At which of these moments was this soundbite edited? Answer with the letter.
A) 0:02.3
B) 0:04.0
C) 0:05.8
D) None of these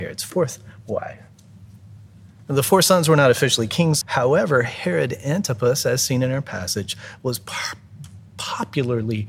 B